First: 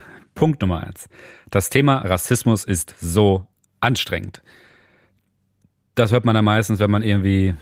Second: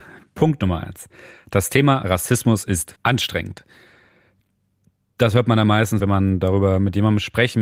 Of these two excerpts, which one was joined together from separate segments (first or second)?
second